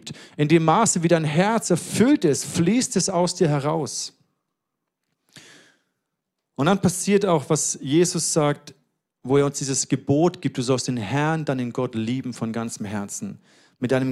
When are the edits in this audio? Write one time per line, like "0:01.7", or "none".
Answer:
none